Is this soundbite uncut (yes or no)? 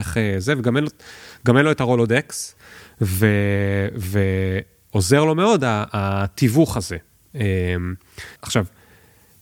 no